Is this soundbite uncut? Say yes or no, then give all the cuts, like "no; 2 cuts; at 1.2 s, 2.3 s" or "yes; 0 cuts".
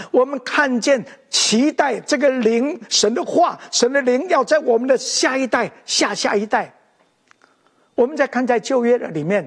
yes; 0 cuts